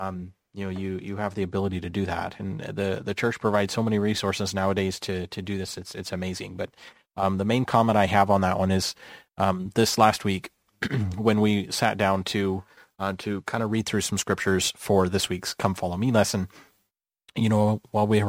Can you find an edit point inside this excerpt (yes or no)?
no